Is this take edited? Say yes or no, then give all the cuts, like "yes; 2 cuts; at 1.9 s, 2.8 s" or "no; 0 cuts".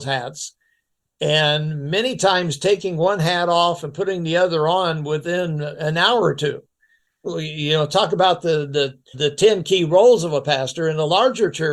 yes; 2 cuts; at 7.2 s, 9.1 s